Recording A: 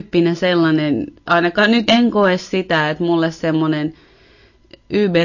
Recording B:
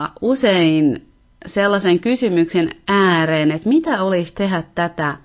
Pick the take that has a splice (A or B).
A